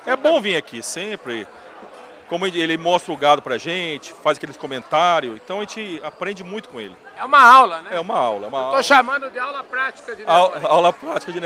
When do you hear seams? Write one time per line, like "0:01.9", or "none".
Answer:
none